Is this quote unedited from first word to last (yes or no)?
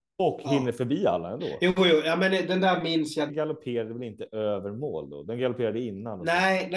no